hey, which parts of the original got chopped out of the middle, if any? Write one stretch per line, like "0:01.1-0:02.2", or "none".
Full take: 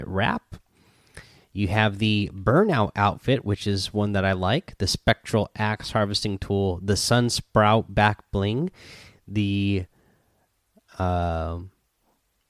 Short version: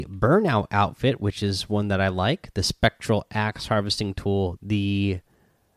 0:06.8-0:09.2